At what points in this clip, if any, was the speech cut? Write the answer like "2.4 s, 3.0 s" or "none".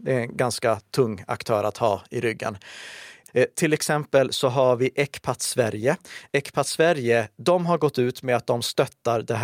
3.3 s